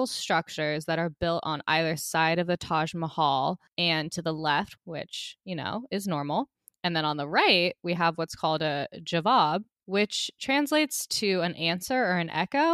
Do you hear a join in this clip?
yes; 1 cut; at 4.8 s

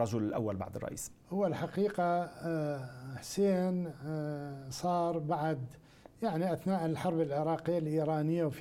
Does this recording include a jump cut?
yes; 1 cut; at 1.2 s

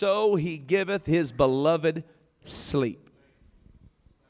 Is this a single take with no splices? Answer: yes; 0 cuts

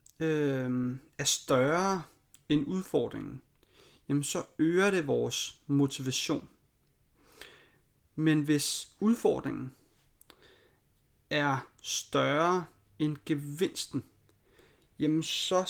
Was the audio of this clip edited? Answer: no; 0 cuts

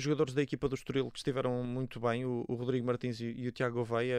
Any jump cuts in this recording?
no; 0 cuts

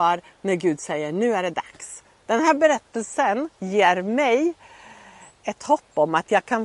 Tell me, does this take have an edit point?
yes; 2 cuts; at 2.2 s, 3.5 s

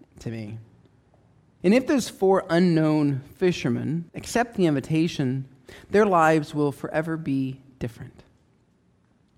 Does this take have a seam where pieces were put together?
yes; 2 cuts; at 1.6 s, 4.1 s

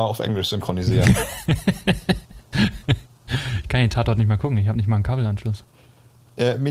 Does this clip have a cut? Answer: no; 0 cuts

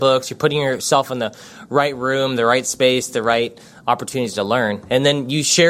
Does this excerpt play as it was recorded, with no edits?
yes; 0 cuts

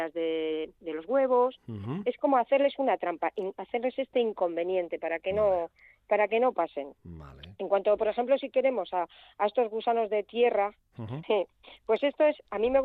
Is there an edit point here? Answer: yes; 1 cut; at 11.2 s

